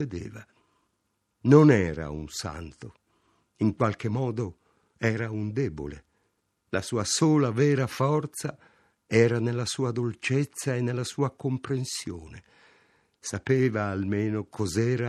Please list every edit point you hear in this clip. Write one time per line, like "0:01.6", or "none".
none